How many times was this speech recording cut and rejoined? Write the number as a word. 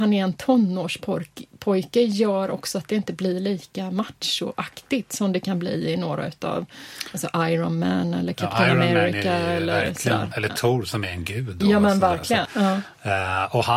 one